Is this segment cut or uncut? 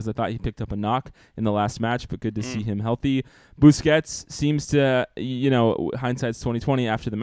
uncut